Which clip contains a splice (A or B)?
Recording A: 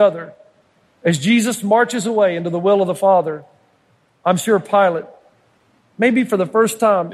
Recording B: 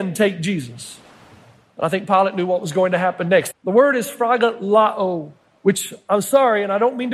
B